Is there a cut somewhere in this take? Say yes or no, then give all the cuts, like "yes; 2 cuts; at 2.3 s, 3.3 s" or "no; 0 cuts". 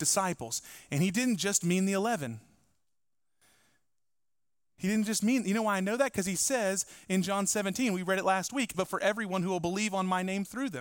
yes; 1 cut; at 8.7 s